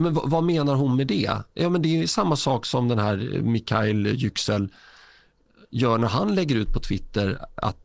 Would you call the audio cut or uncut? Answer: uncut